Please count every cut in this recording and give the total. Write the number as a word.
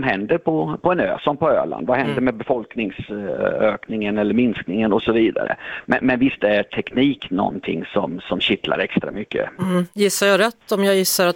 one